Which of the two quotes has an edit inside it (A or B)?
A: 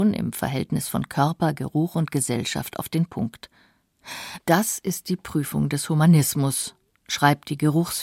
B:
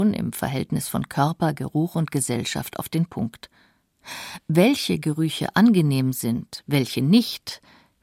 A